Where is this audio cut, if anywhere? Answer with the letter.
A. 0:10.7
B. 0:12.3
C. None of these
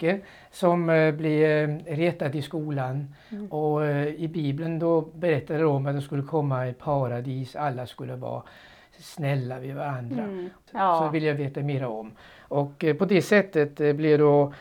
A